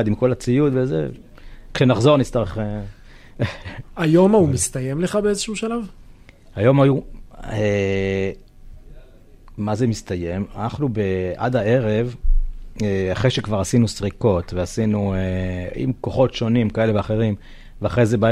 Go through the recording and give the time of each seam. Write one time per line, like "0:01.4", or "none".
none